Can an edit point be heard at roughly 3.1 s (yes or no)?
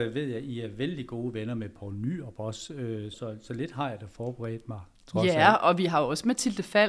yes